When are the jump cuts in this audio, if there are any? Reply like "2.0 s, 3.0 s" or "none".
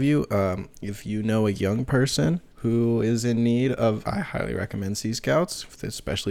2.5 s, 4.0 s